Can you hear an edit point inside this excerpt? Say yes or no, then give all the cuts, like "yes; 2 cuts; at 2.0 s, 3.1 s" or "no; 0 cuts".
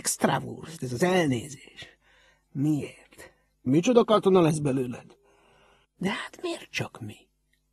yes; 2 cuts; at 3.7 s, 5.8 s